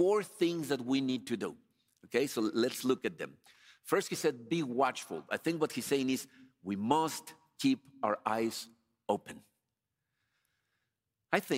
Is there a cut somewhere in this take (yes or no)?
no